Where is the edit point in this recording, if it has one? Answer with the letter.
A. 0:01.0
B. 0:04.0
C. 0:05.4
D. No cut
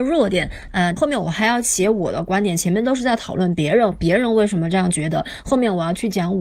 A